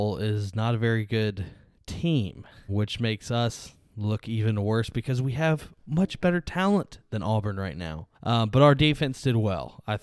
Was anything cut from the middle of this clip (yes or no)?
yes